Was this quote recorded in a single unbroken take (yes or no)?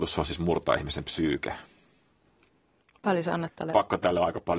yes